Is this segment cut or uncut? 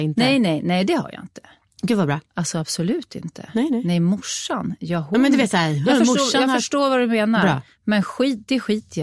cut